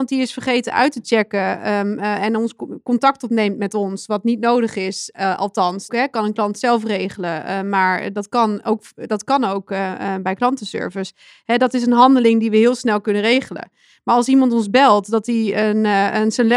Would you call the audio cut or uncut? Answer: cut